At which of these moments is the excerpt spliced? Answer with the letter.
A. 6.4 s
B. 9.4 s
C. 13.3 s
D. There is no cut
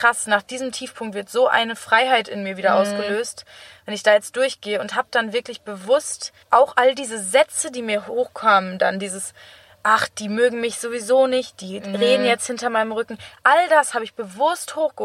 A